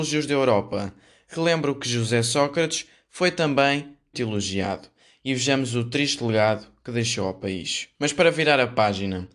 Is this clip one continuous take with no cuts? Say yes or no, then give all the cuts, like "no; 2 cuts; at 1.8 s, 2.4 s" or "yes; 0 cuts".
no; 2 cuts; at 4.1 s, 7.9 s